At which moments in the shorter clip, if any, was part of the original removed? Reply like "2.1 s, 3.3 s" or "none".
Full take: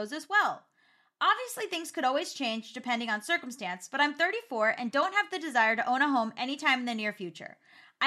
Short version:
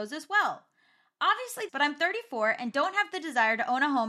1.7 s